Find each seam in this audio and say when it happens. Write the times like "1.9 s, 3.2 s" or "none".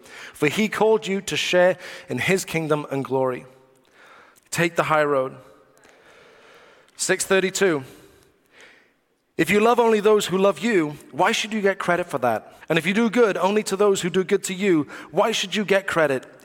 4.3 s, 12.6 s